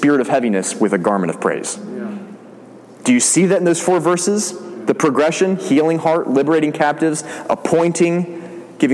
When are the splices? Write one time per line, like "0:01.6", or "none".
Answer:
none